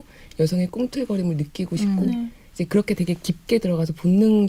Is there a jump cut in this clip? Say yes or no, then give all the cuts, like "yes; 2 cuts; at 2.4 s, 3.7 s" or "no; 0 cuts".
no; 0 cuts